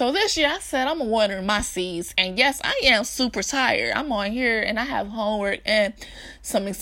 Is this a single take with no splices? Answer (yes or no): yes